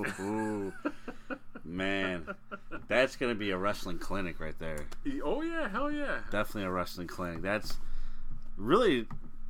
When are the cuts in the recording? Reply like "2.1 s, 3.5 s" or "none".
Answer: none